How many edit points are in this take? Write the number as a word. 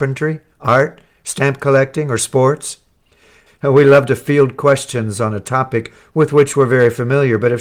one